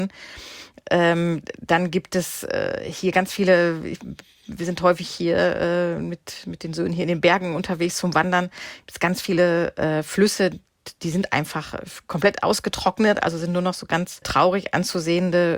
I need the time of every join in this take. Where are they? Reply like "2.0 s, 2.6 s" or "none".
none